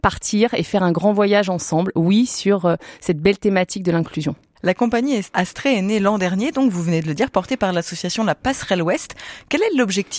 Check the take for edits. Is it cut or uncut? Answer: uncut